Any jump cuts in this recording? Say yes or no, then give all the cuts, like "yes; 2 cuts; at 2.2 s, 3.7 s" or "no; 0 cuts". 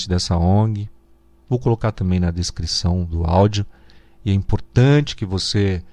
yes; 1 cut; at 1.4 s